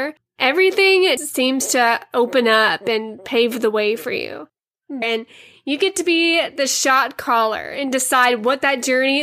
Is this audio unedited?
no; 2 cuts; at 1.2 s, 5.0 s

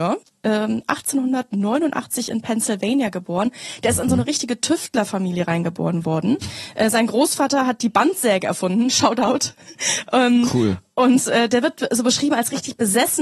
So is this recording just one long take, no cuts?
yes; 0 cuts

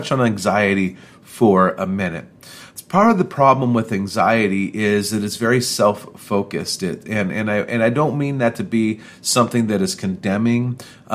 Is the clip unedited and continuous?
yes; 0 cuts

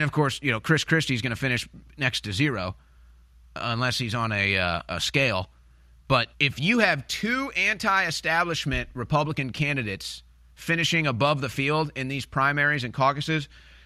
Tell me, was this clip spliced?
yes; 2 cuts; at 4.9 s, 6.3 s

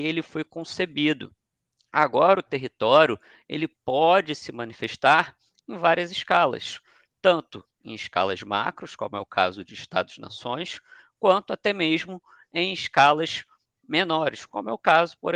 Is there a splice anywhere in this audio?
no; 0 cuts

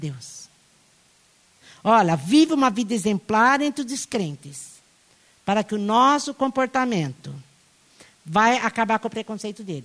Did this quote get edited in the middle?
no; 0 cuts

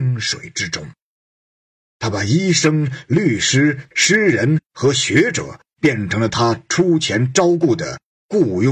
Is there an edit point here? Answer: yes; 2 cuts; at 1.8 s, 3.9 s

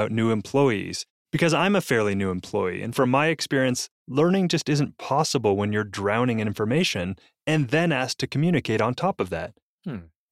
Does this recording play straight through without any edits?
yes; 0 cuts

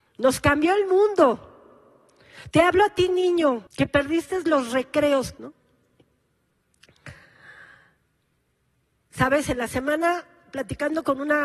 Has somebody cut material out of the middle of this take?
yes; 3 cuts; at 2.5 s, 3.7 s, 5.4 s

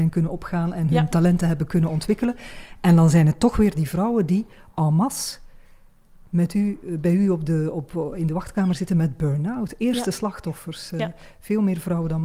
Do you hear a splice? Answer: no; 0 cuts

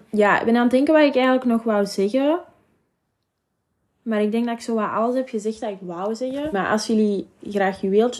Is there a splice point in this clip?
yes; 1 cut; at 6.5 s

